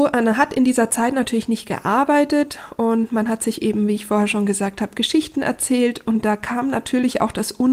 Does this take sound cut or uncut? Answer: uncut